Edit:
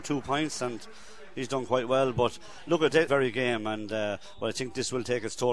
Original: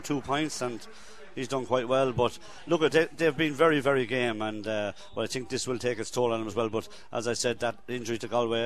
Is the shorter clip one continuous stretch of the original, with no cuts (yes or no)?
no